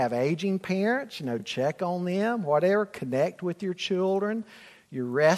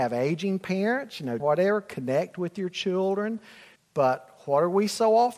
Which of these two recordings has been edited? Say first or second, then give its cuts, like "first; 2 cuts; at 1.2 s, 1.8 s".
second; 2 cuts; at 1.4 s, 3.8 s